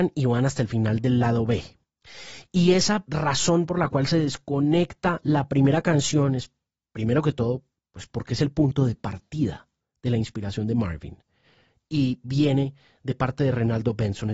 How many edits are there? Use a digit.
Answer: 0